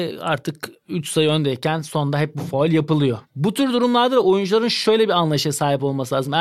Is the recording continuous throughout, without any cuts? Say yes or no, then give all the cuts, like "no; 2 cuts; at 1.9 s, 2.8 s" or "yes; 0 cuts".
no; 1 cut; at 3.3 s